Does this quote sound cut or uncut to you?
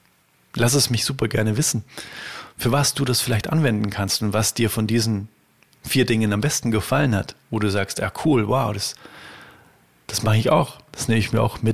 uncut